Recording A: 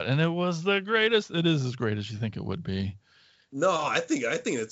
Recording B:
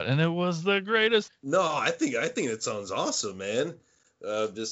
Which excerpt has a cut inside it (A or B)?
B